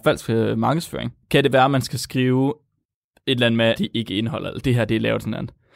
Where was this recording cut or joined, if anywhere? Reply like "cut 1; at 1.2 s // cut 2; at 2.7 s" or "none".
cut 1; at 1.2 s // cut 2; at 3.8 s